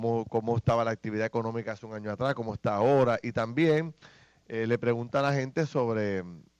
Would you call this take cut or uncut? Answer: uncut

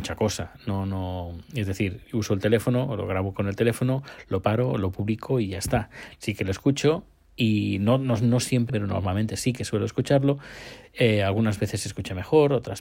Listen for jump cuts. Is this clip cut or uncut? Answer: cut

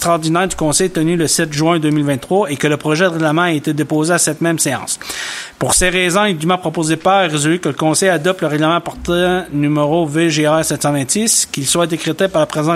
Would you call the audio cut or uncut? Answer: uncut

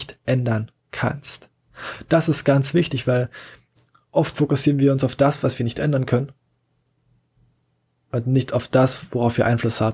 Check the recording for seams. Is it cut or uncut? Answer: uncut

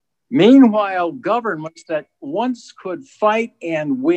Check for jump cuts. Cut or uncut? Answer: uncut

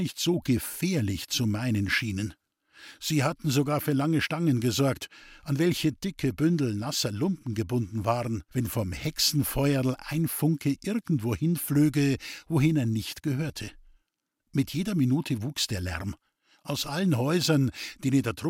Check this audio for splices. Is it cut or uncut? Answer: cut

